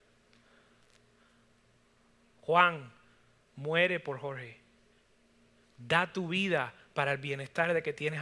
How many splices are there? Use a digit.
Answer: 0